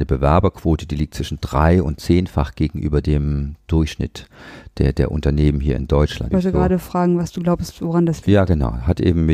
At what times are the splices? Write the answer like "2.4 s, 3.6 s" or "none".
6.3 s